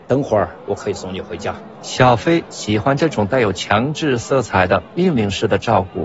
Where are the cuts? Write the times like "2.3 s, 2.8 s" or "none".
1.7 s

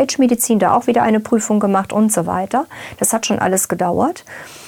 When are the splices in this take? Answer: none

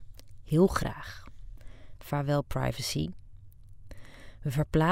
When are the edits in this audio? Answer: 2.0 s

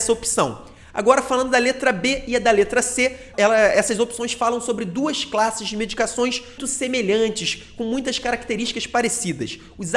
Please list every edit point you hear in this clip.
3.3 s, 6.6 s

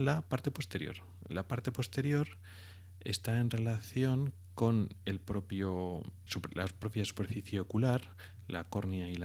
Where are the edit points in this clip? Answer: 6.3 s

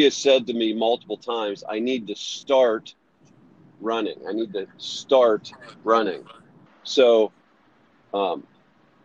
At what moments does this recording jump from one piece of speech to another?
6.7 s

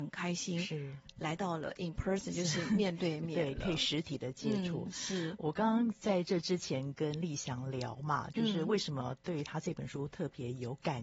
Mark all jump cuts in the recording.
none

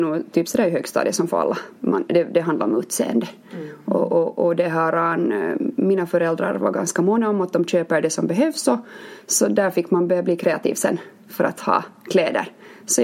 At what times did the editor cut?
none

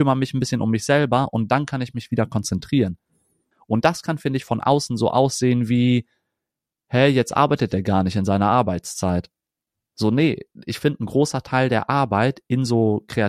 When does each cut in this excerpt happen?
3.5 s

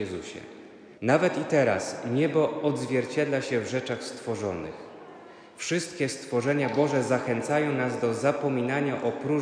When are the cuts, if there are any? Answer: 1.0 s

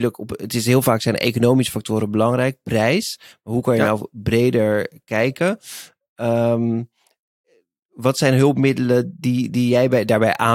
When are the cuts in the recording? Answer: none

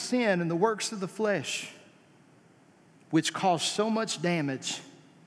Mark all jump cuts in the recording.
none

